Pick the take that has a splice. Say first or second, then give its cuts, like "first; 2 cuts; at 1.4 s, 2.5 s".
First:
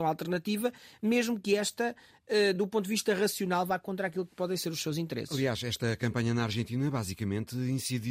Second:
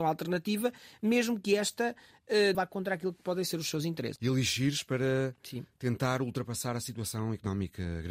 second; 2 cuts; at 2.5 s, 4.2 s